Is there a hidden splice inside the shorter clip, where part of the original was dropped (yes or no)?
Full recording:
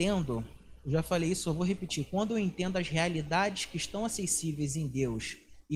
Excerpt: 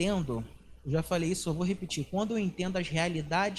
no